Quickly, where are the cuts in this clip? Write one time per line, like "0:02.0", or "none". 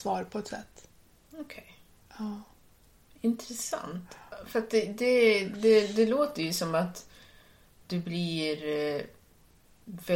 none